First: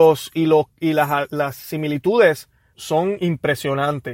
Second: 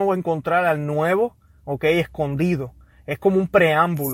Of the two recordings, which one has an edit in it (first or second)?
first